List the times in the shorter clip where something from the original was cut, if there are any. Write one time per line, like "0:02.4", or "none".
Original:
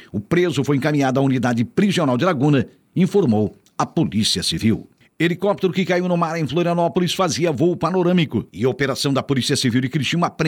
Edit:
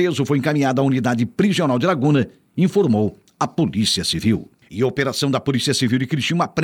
0:04.7